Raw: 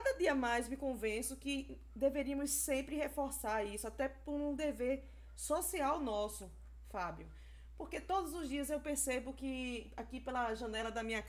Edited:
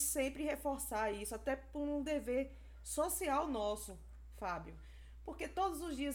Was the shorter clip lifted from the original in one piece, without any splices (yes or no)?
yes